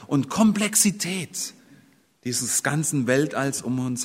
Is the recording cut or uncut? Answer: uncut